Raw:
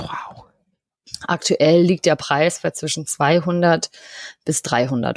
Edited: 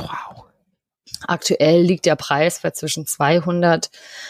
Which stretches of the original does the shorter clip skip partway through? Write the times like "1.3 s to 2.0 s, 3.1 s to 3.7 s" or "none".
none